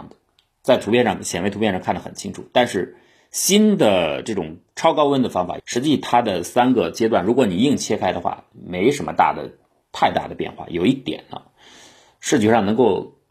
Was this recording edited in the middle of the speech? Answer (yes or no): yes